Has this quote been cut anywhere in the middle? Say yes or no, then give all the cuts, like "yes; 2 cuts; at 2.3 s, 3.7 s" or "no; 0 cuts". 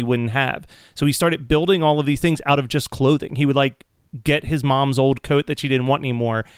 no; 0 cuts